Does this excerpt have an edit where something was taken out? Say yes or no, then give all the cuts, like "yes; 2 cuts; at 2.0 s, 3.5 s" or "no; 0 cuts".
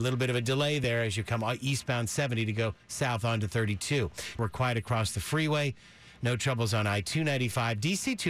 yes; 1 cut; at 4.4 s